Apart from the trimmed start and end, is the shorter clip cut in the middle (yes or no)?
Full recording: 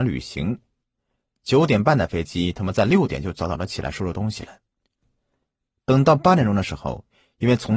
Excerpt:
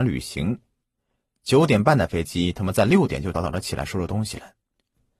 yes